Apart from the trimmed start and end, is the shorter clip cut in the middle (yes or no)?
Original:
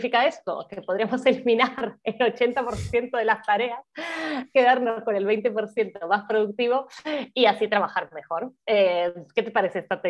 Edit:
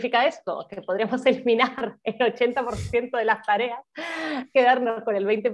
no